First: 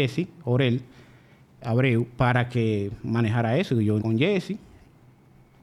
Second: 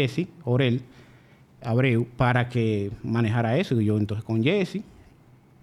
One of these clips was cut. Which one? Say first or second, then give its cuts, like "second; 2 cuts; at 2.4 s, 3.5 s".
first; 1 cut; at 4.0 s